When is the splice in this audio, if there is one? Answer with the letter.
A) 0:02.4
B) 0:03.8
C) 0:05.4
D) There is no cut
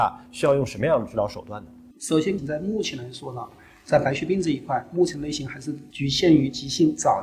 A